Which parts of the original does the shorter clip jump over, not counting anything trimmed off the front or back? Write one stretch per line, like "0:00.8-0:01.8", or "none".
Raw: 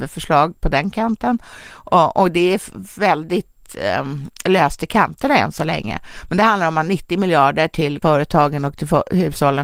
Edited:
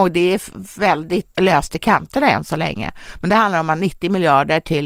0:03.5-0:04.4